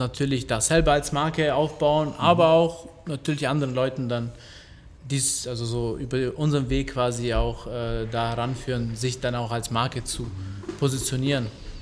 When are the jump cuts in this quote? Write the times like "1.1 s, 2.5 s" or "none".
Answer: 5.0 s